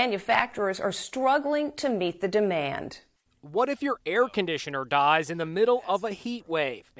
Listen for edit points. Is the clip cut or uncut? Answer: uncut